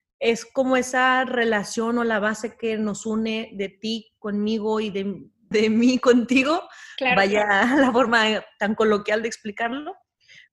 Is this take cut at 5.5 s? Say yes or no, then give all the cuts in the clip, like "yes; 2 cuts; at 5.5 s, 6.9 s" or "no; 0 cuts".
yes; 1 cut; at 5.5 s